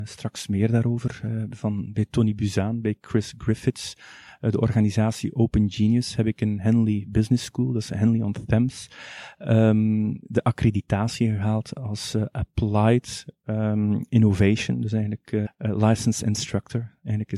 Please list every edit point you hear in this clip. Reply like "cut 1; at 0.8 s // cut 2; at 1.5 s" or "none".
cut 1; at 15.5 s